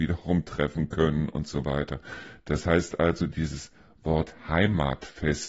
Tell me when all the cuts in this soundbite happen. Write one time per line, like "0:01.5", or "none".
none